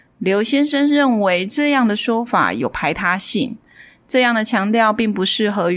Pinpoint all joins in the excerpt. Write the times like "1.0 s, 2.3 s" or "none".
none